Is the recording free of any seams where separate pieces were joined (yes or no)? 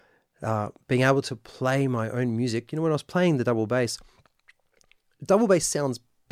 yes